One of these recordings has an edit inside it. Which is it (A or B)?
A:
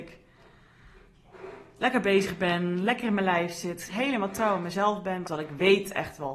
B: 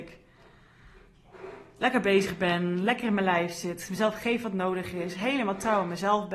A